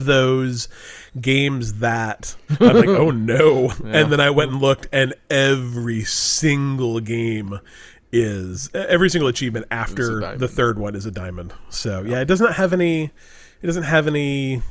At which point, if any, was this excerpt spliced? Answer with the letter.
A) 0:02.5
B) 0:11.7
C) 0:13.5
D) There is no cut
A